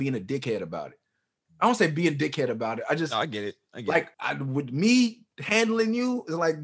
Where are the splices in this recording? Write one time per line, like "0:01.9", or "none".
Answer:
0:04.1